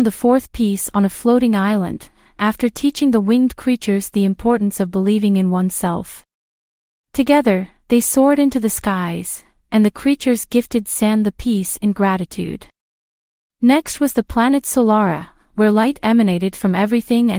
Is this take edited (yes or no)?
no